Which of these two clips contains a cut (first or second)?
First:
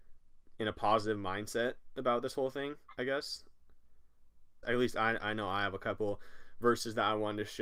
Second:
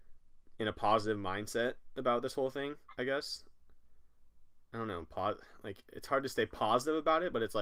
first